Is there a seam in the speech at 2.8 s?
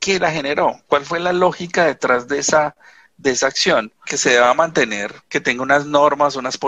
no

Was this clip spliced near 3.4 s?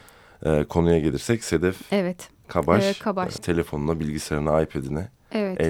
yes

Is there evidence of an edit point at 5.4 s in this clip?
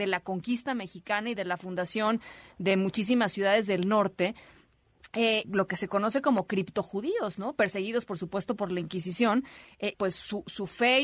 yes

